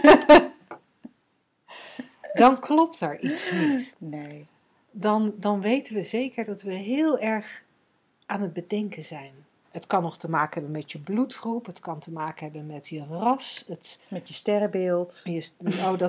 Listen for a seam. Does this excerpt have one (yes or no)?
yes